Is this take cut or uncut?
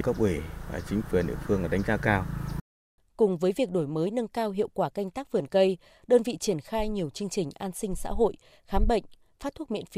cut